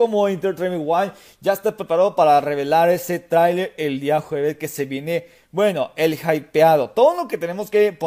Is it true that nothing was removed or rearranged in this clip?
yes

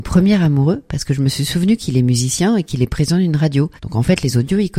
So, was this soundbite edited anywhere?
yes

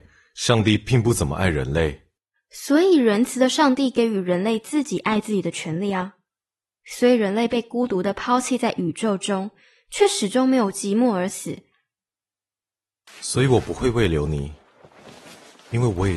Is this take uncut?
no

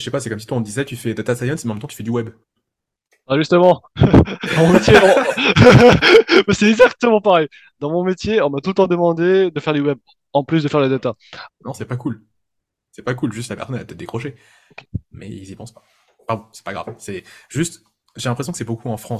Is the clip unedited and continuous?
no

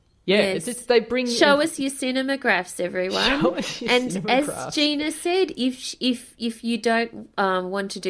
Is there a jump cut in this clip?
no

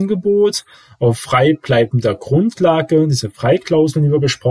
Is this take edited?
no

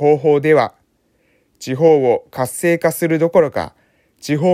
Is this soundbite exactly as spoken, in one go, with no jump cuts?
yes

